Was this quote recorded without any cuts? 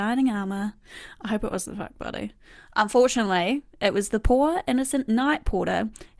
yes; 0 cuts

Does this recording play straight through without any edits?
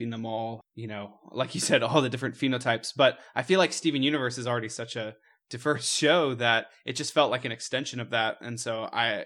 yes; 0 cuts

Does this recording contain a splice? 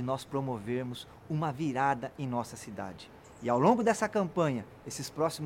no; 0 cuts

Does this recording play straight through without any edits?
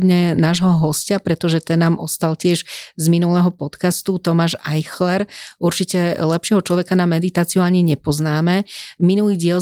yes; 0 cuts

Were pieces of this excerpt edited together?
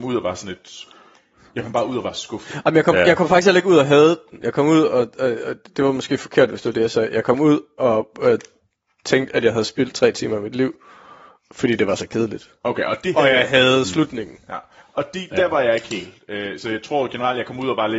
no; 0 cuts

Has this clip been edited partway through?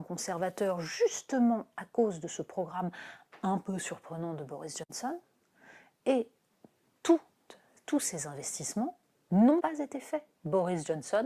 yes; 1 cut; at 9.6 s

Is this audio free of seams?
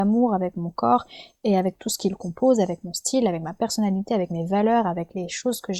yes; 0 cuts

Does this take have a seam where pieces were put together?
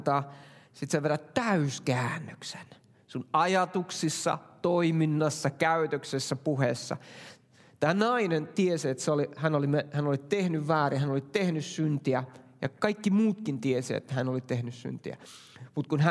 no; 0 cuts

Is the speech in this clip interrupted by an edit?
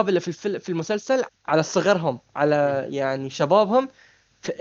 yes; 1 cut; at 1.3 s

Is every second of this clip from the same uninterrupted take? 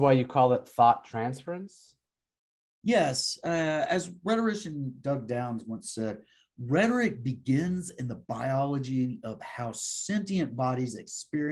yes; 0 cuts

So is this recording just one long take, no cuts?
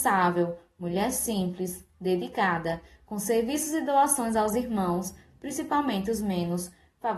yes; 0 cuts

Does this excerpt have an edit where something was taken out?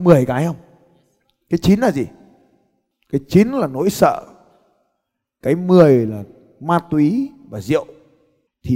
no; 0 cuts

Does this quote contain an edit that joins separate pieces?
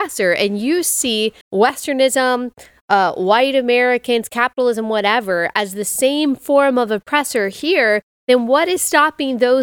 yes; 1 cut; at 1.4 s

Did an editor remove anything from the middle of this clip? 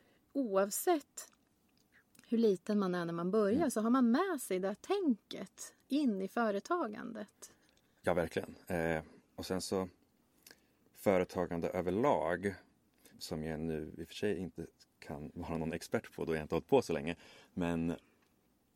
yes; 1 cut; at 13.1 s

